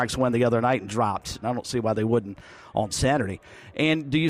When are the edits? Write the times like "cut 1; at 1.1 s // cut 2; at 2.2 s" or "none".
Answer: cut 1; at 1.4 s

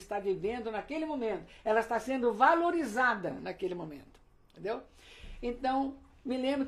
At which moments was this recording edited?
none

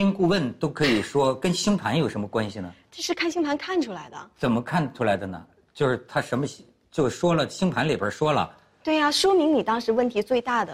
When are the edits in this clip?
none

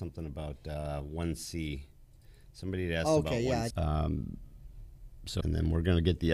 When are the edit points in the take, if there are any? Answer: cut 1; at 3.7 s // cut 2; at 5.4 s

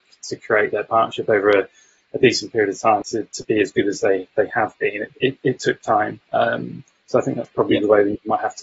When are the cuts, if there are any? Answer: cut 1; at 3.0 s

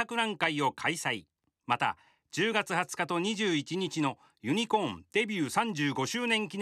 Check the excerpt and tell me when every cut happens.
none

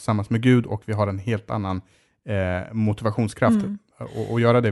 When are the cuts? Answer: none

